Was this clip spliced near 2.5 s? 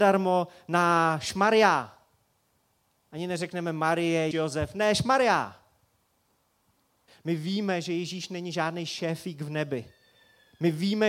no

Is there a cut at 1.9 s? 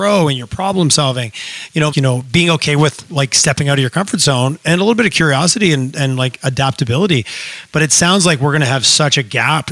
yes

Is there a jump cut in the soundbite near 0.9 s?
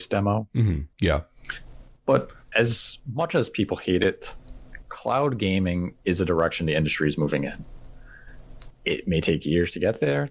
yes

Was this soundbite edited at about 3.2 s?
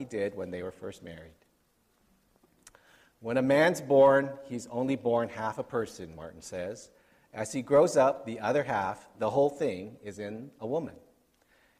no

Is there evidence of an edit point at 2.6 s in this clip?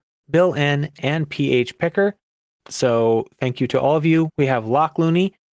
yes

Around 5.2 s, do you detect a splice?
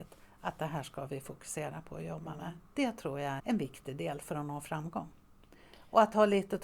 no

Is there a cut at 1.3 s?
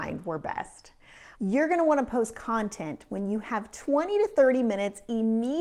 yes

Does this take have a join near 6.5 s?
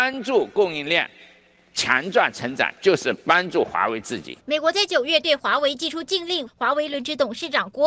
yes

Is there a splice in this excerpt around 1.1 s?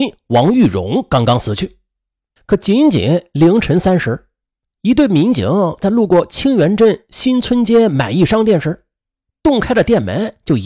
no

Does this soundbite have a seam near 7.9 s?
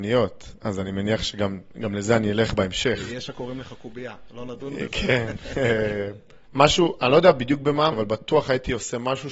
yes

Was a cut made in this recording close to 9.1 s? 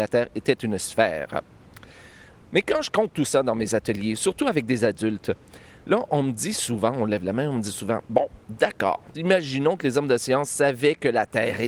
yes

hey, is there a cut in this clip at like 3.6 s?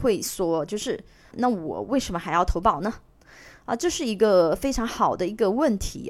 no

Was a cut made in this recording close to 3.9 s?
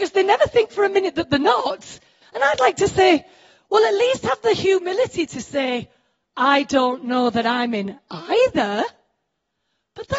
no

